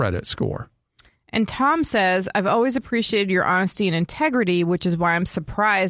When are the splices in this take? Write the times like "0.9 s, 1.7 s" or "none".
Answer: none